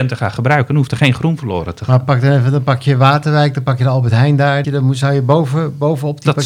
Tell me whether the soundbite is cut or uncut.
cut